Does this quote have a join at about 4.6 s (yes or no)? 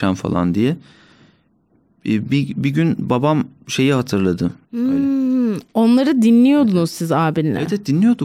yes